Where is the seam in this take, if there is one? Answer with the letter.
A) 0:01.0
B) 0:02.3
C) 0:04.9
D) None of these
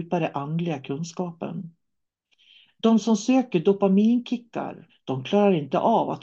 C